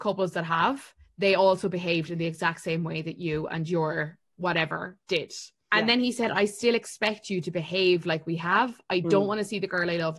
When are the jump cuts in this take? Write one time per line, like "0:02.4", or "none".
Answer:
0:05.7